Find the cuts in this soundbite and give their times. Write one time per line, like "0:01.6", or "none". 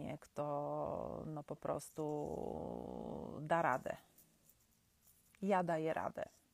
none